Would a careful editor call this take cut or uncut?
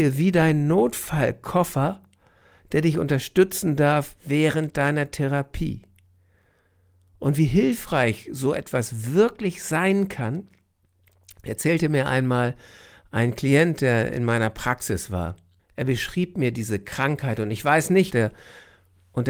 cut